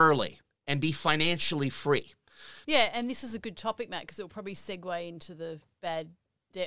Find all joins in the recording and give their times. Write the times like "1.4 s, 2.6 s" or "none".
2.6 s